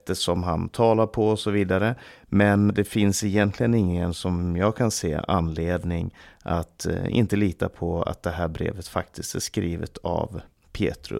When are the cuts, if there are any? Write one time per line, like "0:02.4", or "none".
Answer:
0:02.7